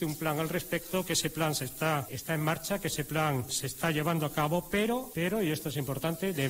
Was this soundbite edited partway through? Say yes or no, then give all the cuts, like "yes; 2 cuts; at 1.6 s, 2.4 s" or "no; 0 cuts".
no; 0 cuts